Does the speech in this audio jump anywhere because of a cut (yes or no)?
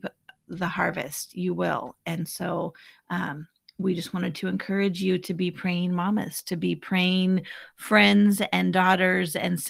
no